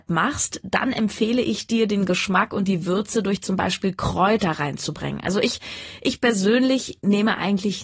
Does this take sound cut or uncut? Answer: uncut